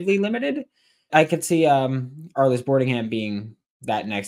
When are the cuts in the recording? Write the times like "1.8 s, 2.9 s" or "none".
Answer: 1.1 s